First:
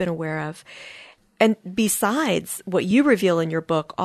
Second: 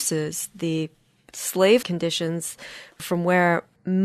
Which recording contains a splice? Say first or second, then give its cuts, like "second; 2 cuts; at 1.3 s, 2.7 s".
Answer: second; 1 cut; at 1.8 s